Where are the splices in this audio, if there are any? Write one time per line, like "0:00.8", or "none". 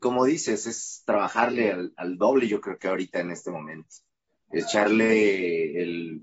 none